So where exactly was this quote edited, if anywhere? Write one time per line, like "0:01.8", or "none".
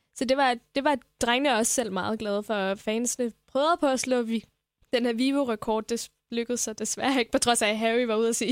none